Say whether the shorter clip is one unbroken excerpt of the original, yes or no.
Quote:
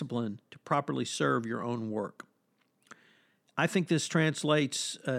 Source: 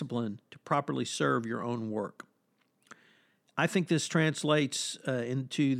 yes